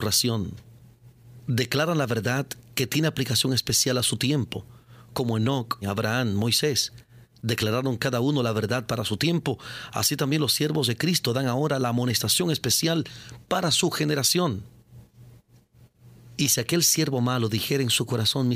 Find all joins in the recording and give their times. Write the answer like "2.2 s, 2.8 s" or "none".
5.8 s, 16.4 s